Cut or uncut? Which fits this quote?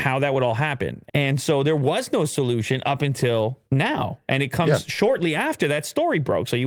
cut